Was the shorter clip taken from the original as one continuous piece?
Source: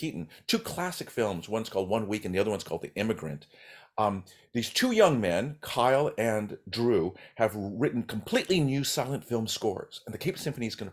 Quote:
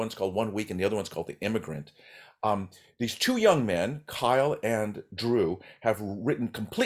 yes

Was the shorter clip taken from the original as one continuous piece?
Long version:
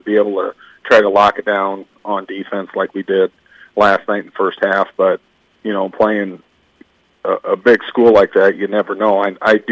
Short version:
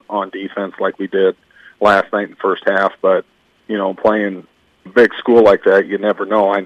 no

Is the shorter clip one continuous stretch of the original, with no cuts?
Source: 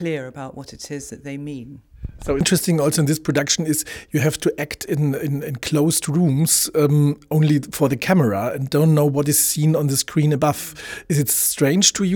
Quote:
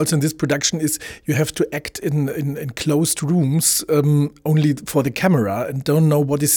yes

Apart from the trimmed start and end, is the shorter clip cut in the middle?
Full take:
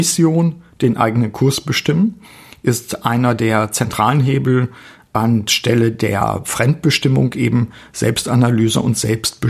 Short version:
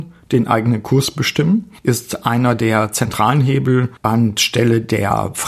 yes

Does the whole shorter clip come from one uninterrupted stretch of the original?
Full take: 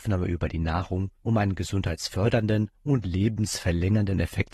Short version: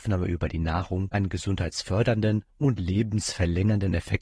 no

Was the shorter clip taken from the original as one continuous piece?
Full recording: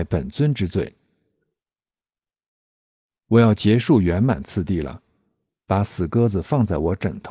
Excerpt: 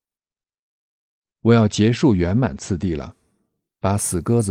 yes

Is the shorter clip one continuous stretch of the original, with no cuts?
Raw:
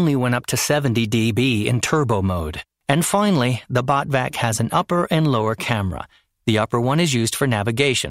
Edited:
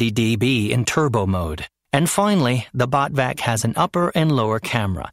yes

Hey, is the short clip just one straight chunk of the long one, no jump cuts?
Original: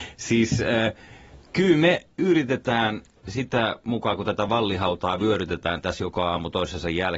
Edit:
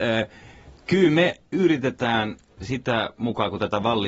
yes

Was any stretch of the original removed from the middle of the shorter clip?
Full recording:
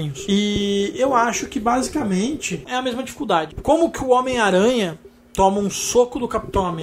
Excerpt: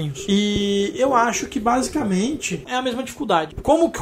no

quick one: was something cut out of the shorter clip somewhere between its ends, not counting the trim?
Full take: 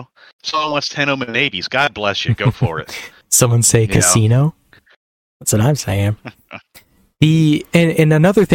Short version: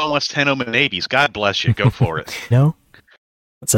yes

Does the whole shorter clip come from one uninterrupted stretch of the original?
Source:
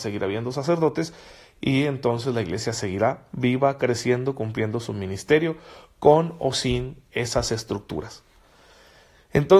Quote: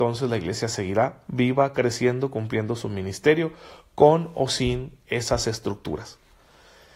yes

